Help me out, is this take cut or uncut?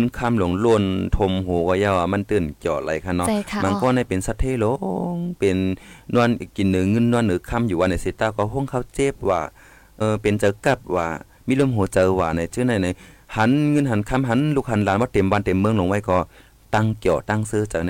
cut